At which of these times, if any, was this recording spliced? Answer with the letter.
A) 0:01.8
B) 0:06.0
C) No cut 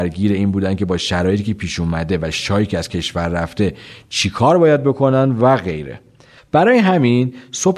C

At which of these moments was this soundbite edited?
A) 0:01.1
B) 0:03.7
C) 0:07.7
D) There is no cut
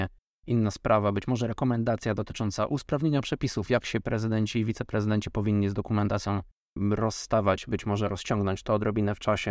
D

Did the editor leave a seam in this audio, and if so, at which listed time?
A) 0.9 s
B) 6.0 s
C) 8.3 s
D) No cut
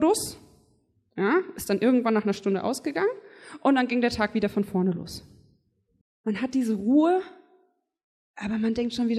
B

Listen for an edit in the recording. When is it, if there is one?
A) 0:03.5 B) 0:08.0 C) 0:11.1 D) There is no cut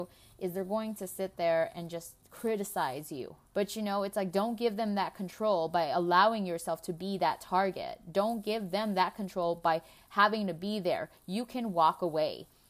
A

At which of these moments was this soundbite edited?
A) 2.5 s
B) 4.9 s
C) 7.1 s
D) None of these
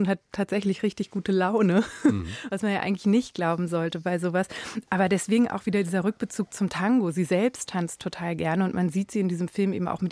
D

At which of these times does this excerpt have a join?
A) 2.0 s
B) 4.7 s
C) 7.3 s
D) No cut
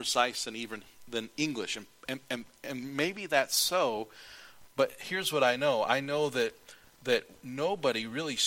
D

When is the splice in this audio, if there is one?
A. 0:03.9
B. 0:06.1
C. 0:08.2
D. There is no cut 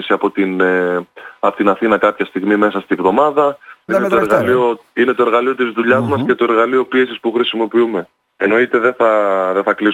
A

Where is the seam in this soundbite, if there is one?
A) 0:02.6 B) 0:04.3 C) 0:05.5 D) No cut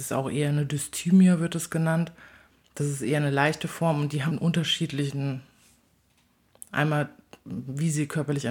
B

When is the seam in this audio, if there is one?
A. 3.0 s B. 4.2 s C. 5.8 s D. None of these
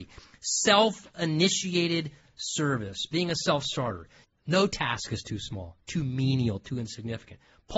B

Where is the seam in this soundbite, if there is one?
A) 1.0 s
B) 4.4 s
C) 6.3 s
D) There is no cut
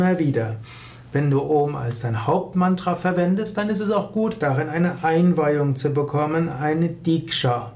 D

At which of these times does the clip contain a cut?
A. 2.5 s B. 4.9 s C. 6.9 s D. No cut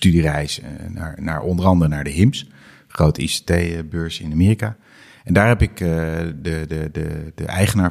D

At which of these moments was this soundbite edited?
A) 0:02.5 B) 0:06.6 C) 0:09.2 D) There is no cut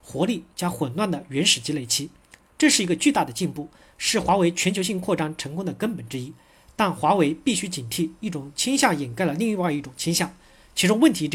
D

